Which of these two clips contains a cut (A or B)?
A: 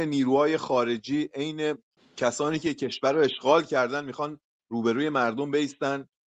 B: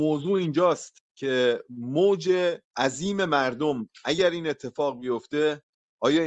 B